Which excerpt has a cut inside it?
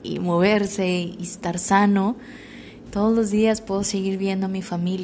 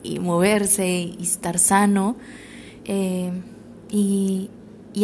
second; 1 cut; at 2.8 s

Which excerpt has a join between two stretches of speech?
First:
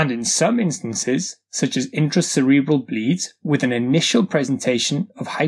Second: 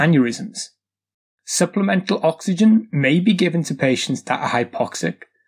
second; 1 cut; at 1.3 s

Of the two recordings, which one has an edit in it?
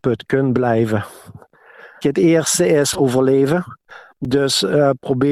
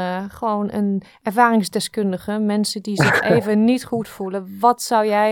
first; 1 cut; at 2.0 s

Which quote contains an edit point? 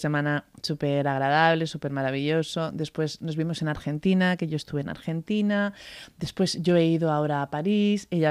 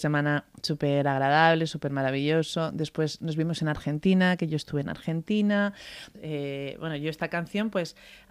second; 1 cut; at 6.1 s

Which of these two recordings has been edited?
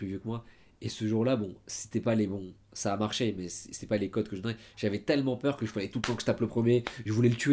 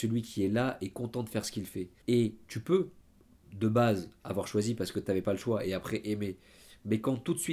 second; 1 cut; at 2.0 s

